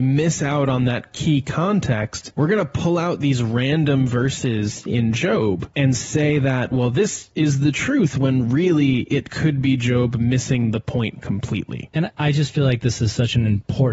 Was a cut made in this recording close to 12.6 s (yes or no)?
no